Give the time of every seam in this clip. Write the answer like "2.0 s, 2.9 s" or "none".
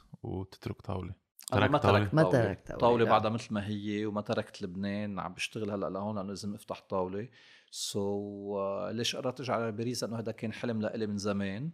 none